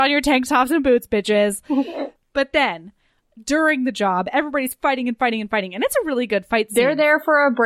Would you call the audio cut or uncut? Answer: uncut